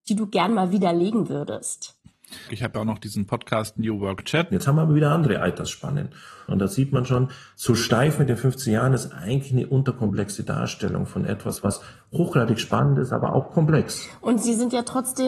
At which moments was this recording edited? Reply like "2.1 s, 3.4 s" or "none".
2.5 s, 4.5 s, 6.5 s